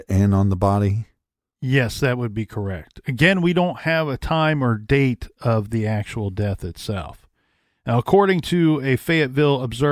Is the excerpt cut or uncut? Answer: uncut